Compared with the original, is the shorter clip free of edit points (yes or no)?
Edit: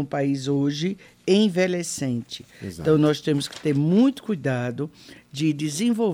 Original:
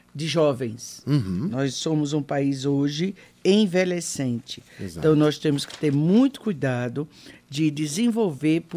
yes